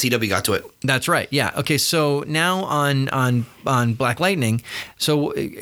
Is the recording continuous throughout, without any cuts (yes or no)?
yes